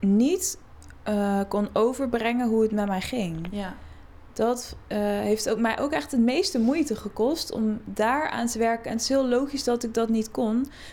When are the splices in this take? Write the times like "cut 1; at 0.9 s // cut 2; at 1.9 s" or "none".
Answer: none